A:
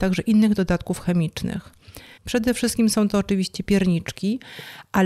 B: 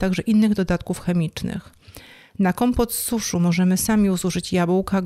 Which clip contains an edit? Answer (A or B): A